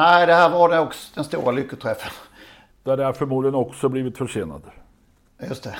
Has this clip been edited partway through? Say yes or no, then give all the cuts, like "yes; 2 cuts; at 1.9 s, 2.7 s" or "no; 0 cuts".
yes; 1 cut; at 2.7 s